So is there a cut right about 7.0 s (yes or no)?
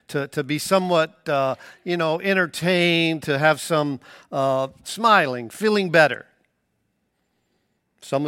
no